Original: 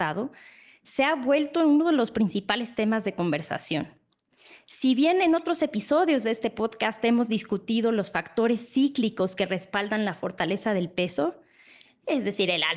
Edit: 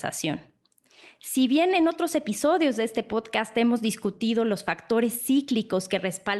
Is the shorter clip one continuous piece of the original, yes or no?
yes